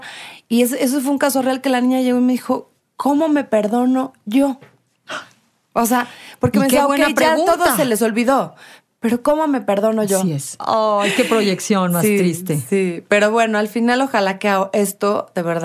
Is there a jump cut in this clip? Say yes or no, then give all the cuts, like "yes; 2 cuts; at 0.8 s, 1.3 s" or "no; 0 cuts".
yes; 1 cut; at 10.6 s